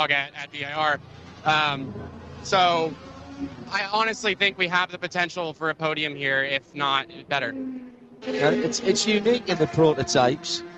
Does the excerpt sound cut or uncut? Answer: cut